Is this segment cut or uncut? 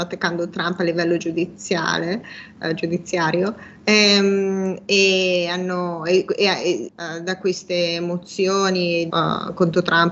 cut